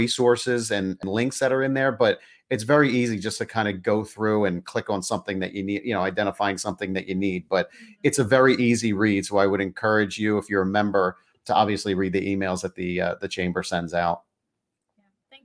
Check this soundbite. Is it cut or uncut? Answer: uncut